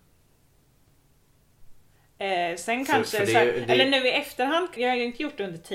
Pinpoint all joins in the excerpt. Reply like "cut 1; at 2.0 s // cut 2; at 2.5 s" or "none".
cut 1; at 4.8 s